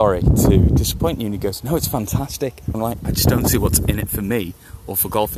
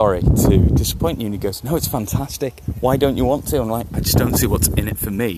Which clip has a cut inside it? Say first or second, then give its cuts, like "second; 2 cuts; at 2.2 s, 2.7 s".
first; 1 cut; at 2.7 s